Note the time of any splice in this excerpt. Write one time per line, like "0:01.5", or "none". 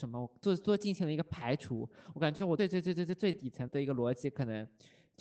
0:02.6
0:03.7